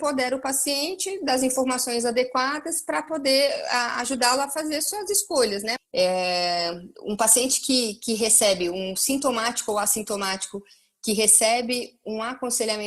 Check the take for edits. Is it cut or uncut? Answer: cut